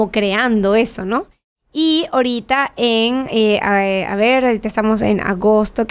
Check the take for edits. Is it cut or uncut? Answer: uncut